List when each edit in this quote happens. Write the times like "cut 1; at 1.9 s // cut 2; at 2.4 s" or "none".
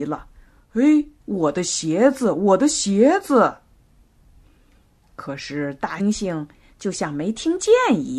cut 1; at 1.2 s // cut 2; at 6.0 s